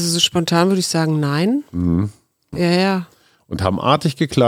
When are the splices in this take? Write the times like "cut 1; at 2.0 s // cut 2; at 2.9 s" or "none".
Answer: cut 1; at 2.5 s